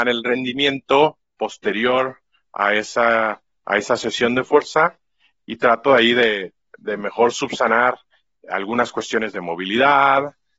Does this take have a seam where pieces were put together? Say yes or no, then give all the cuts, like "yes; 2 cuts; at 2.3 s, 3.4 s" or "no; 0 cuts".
no; 0 cuts